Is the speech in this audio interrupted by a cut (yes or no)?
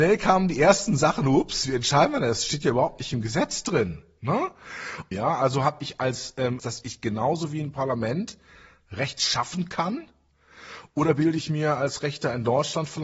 yes